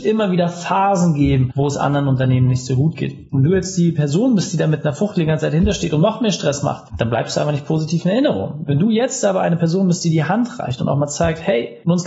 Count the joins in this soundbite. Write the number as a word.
one